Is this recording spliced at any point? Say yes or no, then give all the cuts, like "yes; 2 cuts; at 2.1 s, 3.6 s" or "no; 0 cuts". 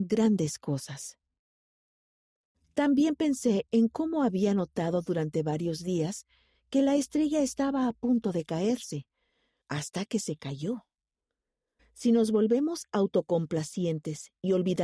yes; 2 cuts; at 9.6 s, 11.8 s